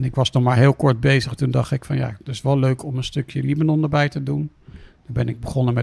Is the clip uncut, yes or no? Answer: yes